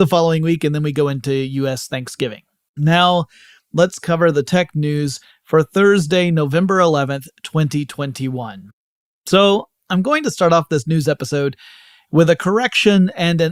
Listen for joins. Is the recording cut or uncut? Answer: cut